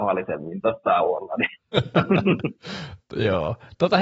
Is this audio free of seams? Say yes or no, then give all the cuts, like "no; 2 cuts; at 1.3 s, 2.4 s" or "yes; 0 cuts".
yes; 0 cuts